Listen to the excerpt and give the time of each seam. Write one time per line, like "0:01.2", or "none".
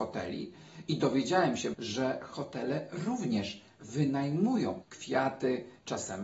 0:01.7
0:04.8